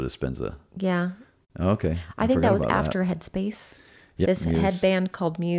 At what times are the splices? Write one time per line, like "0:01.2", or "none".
0:04.2